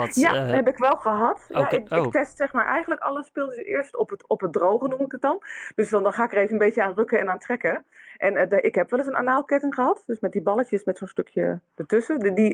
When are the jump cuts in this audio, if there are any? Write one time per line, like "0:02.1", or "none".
none